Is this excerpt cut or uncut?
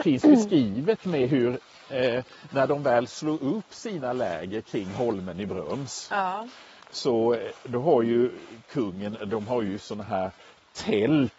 uncut